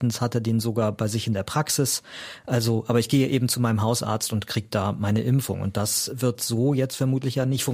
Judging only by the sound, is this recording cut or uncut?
uncut